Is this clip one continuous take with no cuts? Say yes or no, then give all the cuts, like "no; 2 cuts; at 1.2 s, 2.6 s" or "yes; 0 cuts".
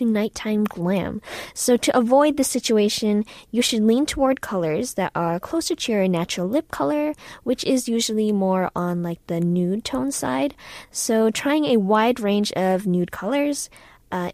yes; 0 cuts